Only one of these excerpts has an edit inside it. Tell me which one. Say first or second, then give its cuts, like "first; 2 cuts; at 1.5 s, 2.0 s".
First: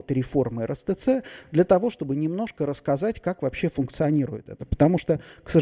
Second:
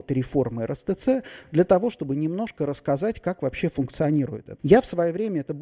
second; 1 cut; at 4.6 s